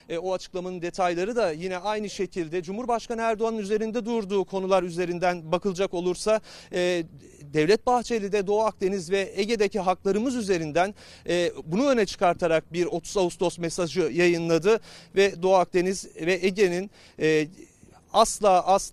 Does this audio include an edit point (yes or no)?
no